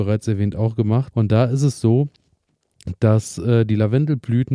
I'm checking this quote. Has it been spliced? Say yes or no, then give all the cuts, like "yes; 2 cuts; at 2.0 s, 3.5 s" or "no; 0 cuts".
yes; 1 cut; at 1.1 s